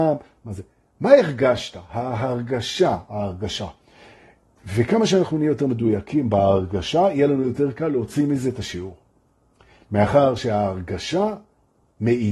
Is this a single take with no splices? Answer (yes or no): yes